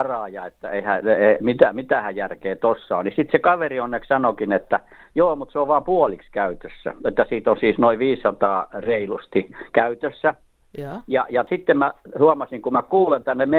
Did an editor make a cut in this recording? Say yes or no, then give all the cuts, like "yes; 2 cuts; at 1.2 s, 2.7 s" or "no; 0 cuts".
no; 0 cuts